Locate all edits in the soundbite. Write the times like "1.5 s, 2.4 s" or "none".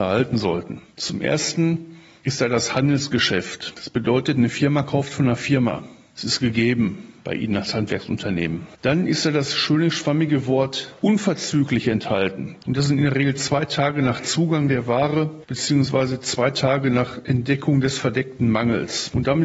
12.6 s